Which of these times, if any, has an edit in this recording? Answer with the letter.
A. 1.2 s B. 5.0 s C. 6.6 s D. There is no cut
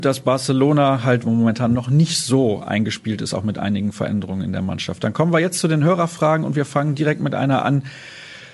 A